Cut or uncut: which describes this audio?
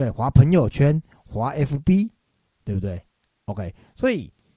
uncut